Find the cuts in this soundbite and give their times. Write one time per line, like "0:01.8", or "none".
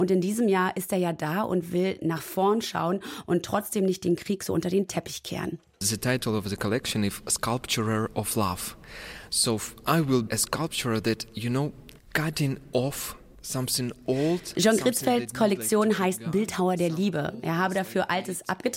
0:10.3